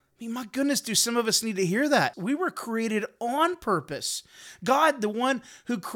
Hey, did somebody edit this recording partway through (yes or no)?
yes